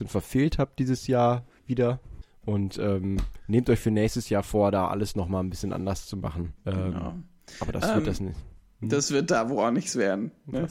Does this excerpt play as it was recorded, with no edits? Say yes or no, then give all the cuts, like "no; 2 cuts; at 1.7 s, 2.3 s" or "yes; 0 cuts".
no; 1 cut; at 6.6 s